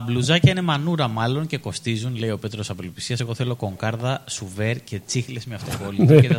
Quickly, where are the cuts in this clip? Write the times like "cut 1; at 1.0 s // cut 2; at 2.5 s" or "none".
none